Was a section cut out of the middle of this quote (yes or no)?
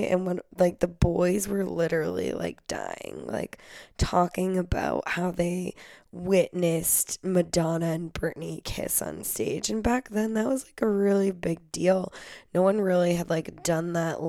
no